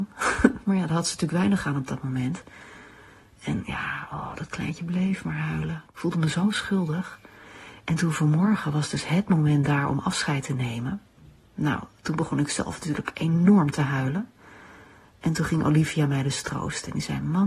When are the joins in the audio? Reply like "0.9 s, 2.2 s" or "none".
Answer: none